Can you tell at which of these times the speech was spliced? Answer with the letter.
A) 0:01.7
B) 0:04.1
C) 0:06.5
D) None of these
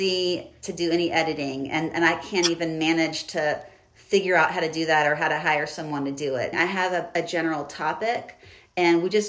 C